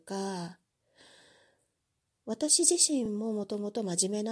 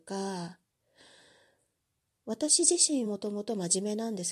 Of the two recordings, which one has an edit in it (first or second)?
second